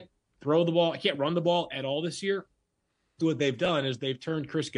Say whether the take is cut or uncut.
cut